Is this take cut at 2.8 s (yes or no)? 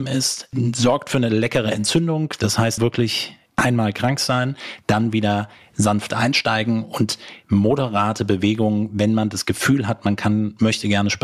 yes